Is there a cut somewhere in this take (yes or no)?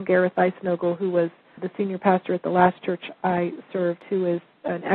yes